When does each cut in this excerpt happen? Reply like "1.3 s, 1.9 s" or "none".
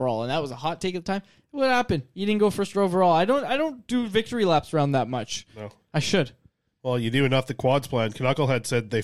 none